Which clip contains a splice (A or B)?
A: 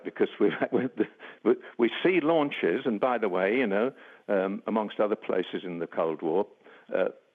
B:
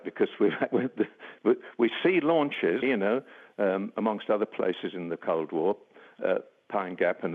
B